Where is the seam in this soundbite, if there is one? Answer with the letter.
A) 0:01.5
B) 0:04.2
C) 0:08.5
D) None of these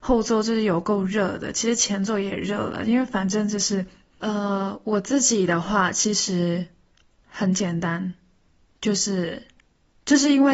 B